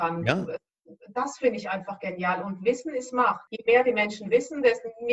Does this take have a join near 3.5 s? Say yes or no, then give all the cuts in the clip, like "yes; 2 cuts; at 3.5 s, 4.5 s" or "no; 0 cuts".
yes; 1 cut; at 3.5 s